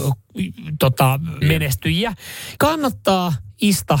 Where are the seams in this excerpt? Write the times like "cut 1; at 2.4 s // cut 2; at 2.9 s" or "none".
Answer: cut 1; at 1.4 s // cut 2; at 2.6 s